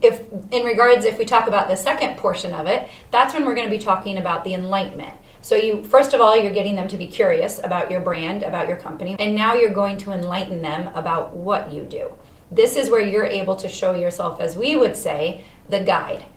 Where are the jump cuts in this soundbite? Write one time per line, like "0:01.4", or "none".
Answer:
0:09.2

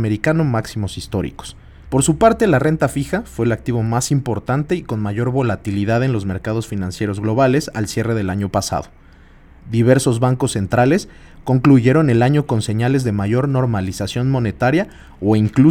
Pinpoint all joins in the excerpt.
0:01.9

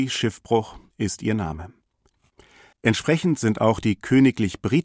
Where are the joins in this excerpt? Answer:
0:02.7

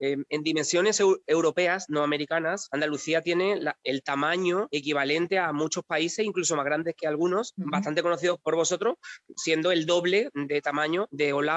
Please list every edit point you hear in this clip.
none

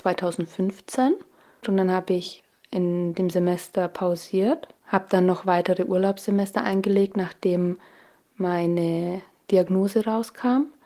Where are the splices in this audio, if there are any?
0:01.6
0:04.8

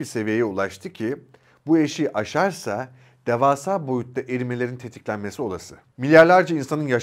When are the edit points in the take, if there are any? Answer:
0:05.8

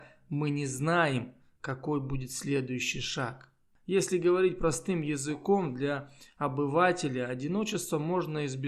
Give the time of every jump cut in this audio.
0:03.7

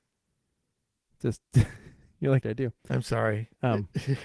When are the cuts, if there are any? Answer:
0:02.4

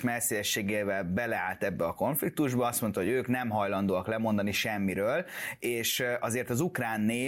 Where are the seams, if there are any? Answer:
none

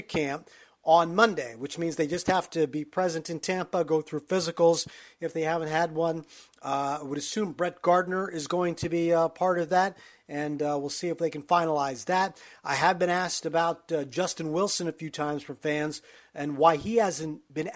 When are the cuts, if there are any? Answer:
none

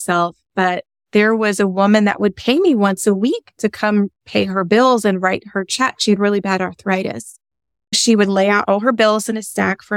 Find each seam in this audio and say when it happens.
none

